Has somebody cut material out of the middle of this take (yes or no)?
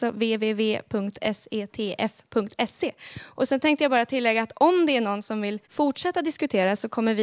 yes